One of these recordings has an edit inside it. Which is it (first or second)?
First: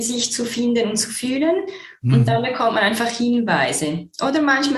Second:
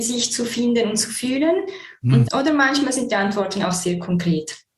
second